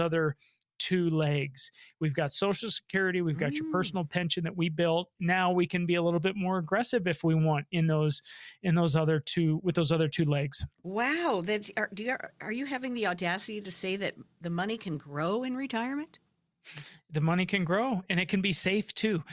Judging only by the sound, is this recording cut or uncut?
cut